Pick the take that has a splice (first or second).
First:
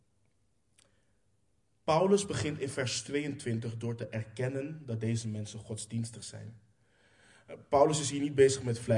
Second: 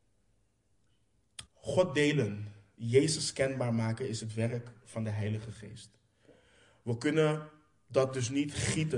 second